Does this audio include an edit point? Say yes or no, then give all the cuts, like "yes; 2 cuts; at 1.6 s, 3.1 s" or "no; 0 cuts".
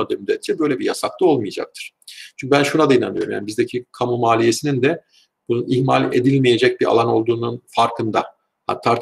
no; 0 cuts